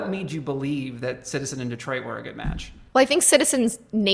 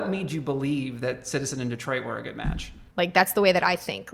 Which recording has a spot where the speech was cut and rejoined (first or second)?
second